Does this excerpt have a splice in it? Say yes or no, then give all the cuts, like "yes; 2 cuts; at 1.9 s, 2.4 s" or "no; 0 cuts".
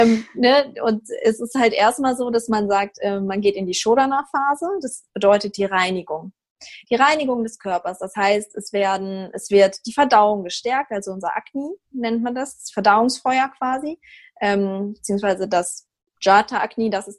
no; 0 cuts